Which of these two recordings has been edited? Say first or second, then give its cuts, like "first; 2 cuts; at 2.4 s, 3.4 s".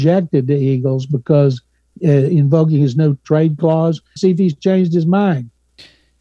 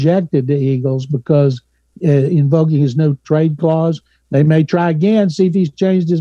first; 1 cut; at 4.2 s